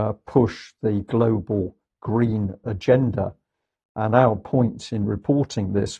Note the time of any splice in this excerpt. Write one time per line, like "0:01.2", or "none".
none